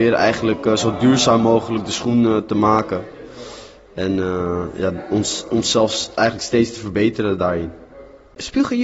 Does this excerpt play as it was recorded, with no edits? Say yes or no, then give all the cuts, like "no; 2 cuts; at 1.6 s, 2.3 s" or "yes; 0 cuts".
yes; 0 cuts